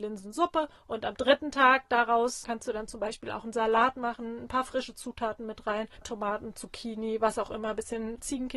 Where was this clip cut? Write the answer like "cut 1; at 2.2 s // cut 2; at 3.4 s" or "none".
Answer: cut 1; at 6.0 s